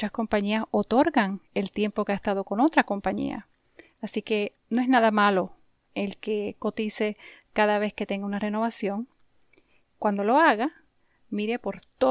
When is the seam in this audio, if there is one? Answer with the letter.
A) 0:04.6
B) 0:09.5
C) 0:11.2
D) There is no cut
A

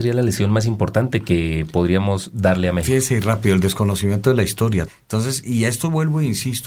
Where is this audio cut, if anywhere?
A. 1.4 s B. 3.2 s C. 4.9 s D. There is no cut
C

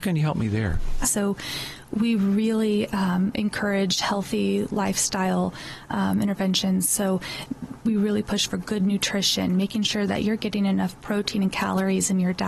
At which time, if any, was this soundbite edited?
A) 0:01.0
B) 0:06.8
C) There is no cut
A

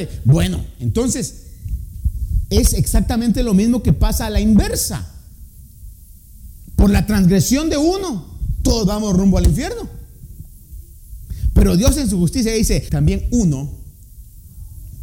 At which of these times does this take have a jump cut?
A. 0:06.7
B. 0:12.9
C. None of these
B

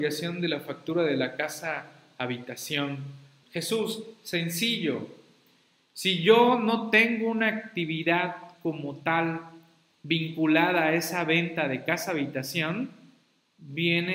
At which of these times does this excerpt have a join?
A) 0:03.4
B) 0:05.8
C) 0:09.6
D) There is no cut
A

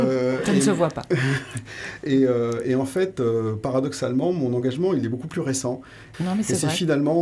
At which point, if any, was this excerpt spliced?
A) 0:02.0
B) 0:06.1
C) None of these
B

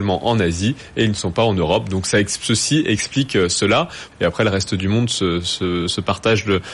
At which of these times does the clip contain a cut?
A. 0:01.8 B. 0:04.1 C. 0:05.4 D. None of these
B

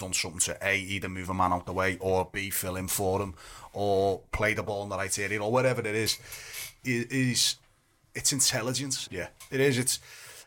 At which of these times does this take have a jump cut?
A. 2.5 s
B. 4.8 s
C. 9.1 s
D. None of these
C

